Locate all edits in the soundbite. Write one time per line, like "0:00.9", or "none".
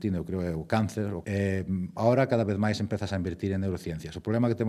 none